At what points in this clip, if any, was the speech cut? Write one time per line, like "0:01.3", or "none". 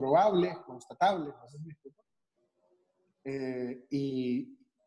none